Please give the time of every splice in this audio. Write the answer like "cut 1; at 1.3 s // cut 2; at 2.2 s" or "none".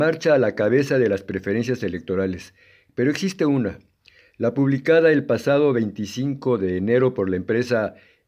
none